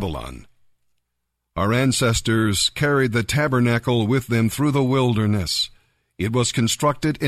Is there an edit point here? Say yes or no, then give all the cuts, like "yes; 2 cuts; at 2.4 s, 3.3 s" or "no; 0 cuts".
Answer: no; 0 cuts